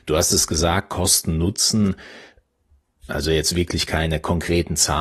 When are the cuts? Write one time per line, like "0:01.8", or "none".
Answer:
0:03.1